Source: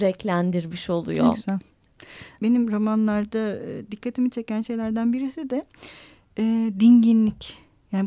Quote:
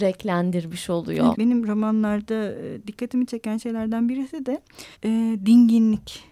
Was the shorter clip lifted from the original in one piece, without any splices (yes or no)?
no